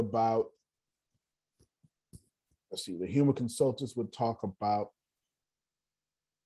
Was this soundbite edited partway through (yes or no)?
no